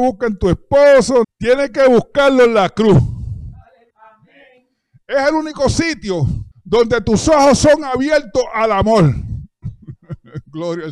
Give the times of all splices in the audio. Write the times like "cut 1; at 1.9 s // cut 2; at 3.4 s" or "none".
cut 1; at 1.2 s // cut 2; at 3.9 s // cut 3; at 6.5 s

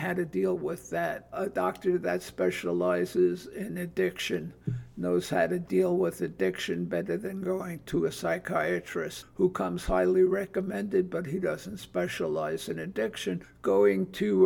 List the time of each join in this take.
cut 1; at 1.3 s

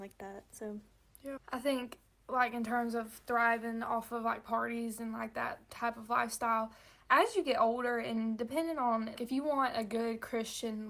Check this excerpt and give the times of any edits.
cut 1; at 1.4 s // cut 2; at 9.2 s

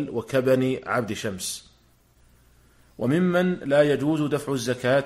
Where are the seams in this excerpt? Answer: none

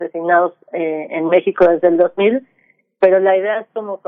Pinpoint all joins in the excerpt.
none

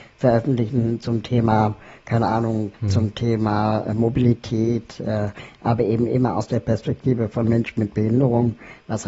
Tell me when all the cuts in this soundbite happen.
cut 1; at 2.7 s

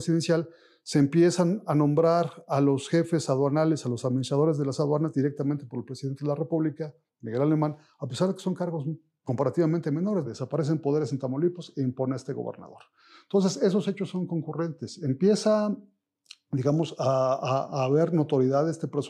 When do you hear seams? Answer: cut 1; at 10.2 s

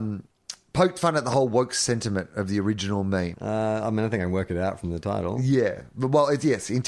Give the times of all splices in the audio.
cut 1; at 3.3 s

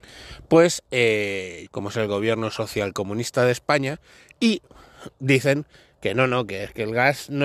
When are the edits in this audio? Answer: cut 1; at 1.7 s

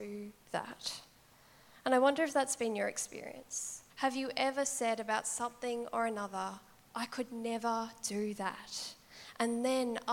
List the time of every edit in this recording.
cut 1; at 3.9 s

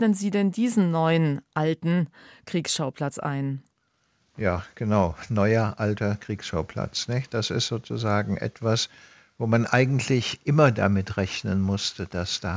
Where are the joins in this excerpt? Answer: none

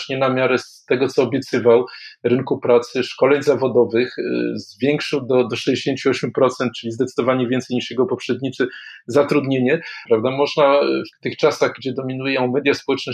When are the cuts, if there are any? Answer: cut 1; at 10.1 s // cut 2; at 11.1 s

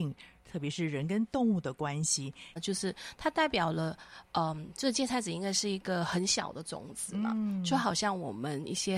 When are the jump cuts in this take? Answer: cut 1; at 2.6 s

